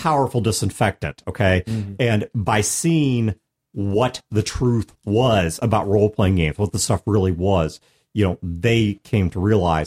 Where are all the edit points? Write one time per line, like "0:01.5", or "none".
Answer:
none